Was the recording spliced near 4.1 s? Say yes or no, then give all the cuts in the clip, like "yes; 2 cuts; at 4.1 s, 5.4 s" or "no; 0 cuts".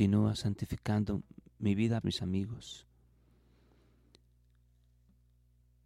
no; 1 cut; at 2.0 s